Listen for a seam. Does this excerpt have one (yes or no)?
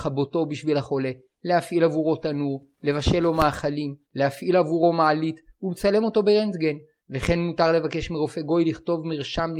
yes